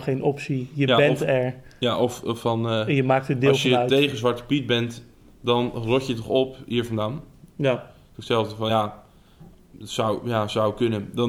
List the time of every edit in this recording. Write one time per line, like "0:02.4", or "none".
none